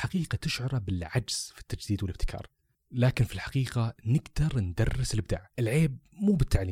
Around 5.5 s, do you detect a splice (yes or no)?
yes